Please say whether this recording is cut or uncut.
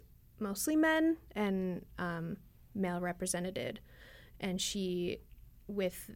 uncut